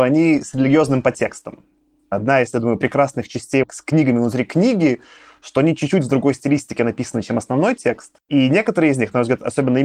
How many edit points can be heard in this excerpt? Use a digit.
0